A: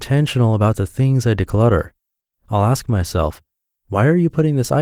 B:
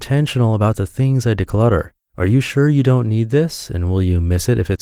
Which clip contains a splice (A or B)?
B